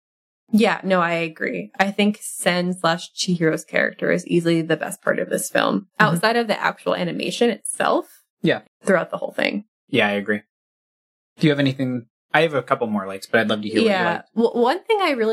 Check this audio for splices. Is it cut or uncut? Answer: cut